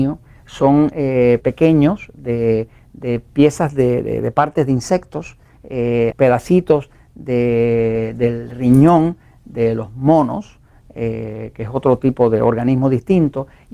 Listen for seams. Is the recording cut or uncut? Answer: cut